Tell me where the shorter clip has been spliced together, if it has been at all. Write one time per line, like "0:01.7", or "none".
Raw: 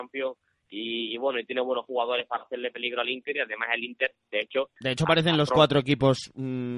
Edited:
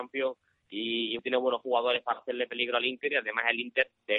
0:01.2